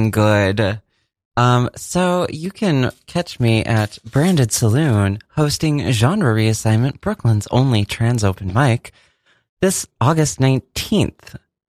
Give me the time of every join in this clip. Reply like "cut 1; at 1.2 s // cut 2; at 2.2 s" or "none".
none